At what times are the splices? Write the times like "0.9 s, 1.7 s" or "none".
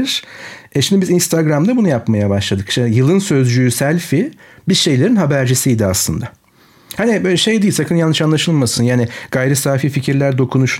none